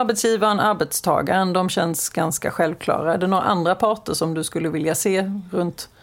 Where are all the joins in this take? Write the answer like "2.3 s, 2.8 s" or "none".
none